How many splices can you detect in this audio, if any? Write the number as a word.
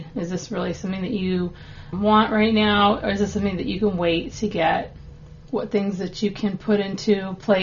two